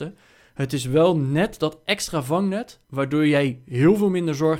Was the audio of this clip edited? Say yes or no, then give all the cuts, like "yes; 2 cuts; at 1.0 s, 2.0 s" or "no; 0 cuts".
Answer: yes; 1 cut; at 2.8 s